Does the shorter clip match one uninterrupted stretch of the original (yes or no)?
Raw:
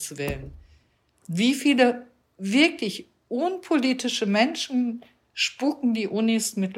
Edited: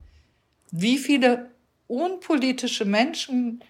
no